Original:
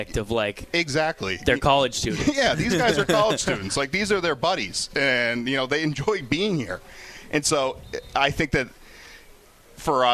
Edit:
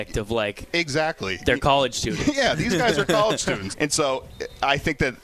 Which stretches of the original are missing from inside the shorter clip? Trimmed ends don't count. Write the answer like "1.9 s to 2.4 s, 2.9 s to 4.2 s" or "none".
3.7 s to 7.2 s